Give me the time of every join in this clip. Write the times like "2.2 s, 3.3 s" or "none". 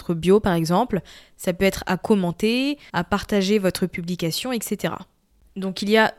2.9 s